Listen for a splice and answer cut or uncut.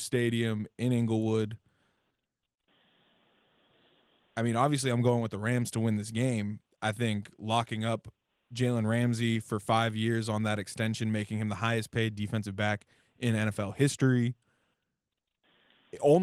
uncut